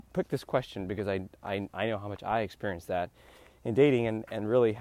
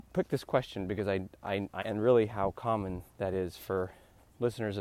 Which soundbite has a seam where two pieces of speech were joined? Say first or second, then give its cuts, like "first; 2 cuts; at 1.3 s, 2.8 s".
second; 1 cut; at 1.8 s